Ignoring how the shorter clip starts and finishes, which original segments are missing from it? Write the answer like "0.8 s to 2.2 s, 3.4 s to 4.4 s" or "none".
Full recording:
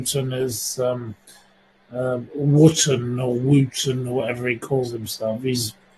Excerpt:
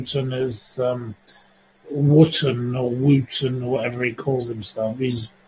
1.8 s to 2.3 s